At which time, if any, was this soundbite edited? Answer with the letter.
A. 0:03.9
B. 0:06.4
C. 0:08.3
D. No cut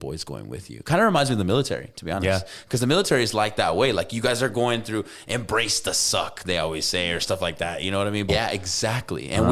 C